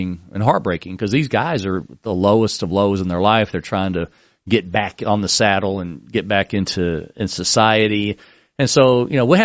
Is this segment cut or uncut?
uncut